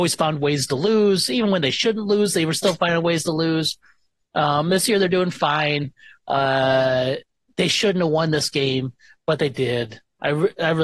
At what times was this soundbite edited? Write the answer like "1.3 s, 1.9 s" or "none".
none